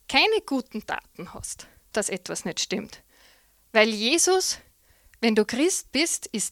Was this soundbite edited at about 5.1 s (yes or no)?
no